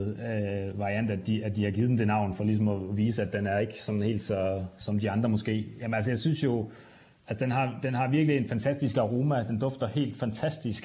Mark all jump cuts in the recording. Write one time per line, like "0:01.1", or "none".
none